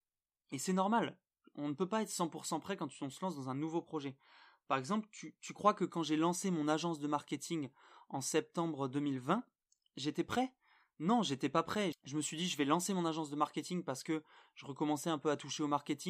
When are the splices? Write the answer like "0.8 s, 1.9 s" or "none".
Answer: 11.9 s